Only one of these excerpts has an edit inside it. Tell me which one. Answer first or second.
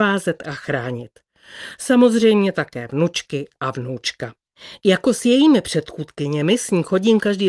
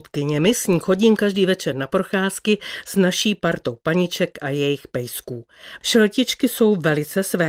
second